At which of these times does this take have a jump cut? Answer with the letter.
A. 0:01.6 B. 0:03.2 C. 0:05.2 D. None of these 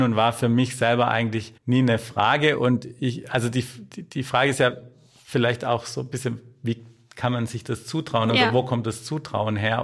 A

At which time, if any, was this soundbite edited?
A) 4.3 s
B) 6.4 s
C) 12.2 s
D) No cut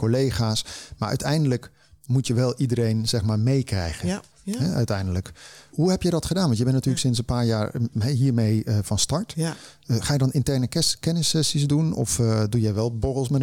A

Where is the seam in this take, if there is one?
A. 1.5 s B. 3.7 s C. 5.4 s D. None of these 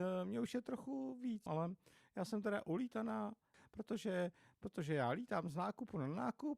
A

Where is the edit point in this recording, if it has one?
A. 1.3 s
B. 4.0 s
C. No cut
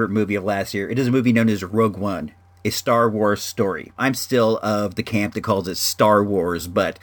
B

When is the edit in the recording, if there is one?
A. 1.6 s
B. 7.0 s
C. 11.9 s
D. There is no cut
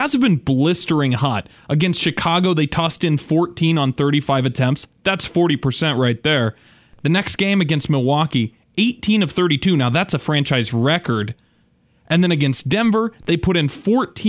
D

